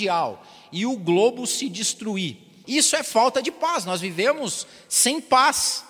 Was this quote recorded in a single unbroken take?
no; 1 cut; at 2.6 s

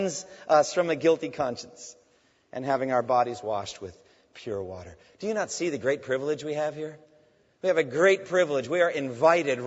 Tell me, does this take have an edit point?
no; 0 cuts

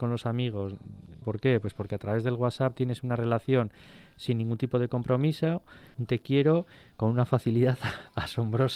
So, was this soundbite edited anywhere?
yes; 2 cuts; at 1.2 s, 5.9 s

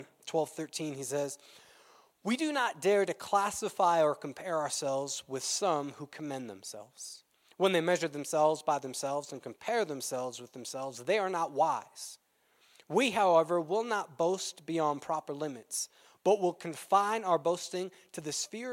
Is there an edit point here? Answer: no; 0 cuts

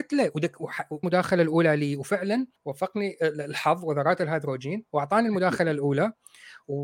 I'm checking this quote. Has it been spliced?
yes; 2 cuts; at 1.0 s, 2.6 s

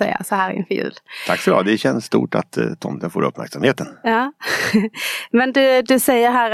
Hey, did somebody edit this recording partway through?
no; 0 cuts

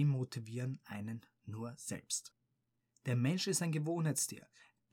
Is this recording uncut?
yes; 0 cuts

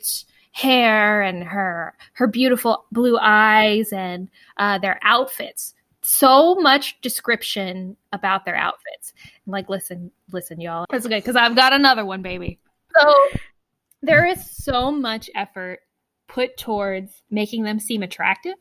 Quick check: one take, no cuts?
no; 2 cuts; at 10.8 s, 12.9 s

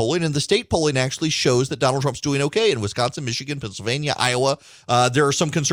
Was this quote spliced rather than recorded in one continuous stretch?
no; 0 cuts

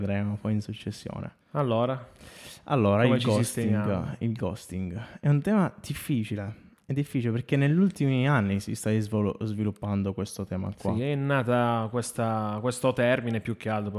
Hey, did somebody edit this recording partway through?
yes; 1 cut; at 1.4 s

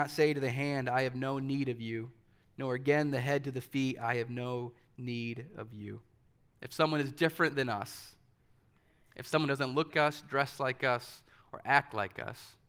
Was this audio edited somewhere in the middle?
yes; 2 cuts; at 6.5 s, 9.9 s

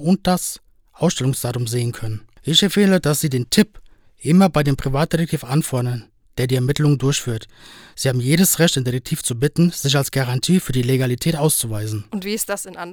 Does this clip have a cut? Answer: no; 0 cuts

